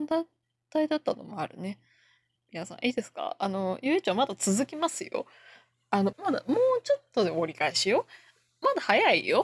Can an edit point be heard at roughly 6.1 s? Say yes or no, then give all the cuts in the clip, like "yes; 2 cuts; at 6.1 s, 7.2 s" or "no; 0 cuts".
yes; 2 cuts; at 2.4 s, 6.1 s